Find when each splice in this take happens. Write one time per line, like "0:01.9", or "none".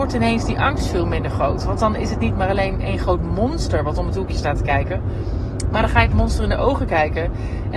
none